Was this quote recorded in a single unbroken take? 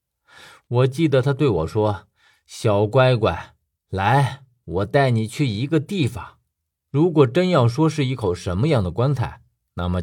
no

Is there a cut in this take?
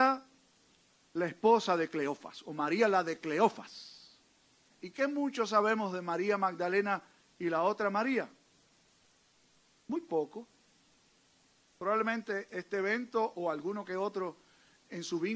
yes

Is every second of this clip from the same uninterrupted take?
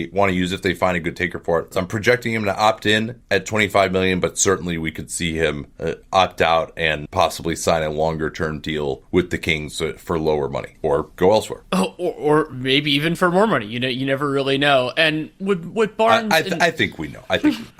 no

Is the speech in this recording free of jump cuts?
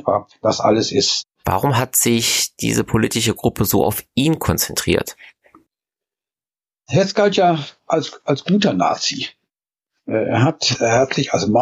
no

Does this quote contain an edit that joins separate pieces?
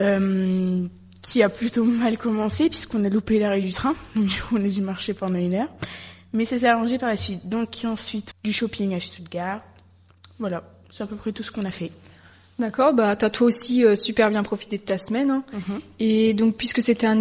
yes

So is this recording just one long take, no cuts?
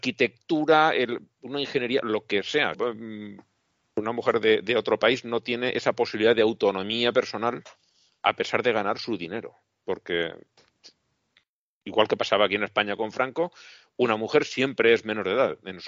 no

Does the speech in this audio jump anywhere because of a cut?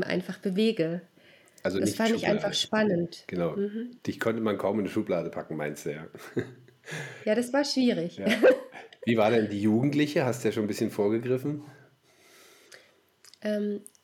no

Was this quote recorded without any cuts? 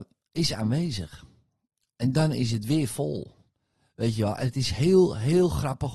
yes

